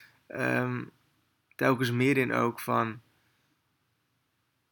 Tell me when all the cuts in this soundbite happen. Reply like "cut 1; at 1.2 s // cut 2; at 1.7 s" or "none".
cut 1; at 1.5 s